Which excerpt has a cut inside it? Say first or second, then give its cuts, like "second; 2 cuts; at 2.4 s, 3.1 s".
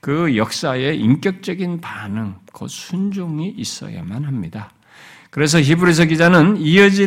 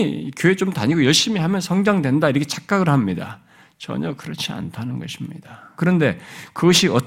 second; 1 cut; at 5.8 s